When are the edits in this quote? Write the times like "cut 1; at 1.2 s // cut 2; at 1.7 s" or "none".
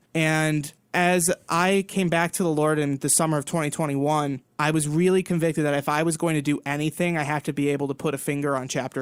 none

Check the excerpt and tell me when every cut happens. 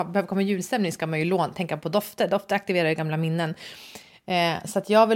none

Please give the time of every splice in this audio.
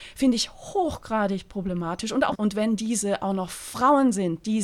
cut 1; at 2.3 s

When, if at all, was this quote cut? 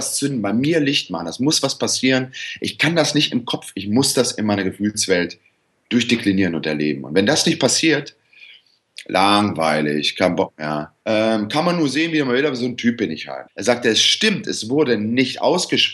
cut 1; at 11.0 s // cut 2; at 13.5 s

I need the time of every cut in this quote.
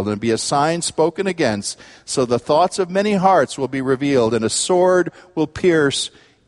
none

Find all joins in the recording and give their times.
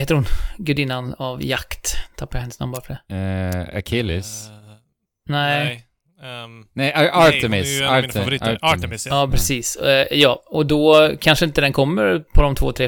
none

